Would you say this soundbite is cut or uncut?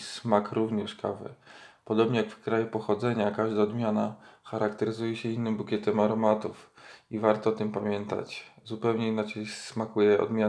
uncut